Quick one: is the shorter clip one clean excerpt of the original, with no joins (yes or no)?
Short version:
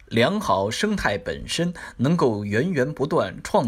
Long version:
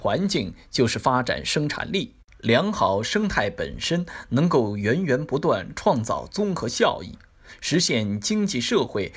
yes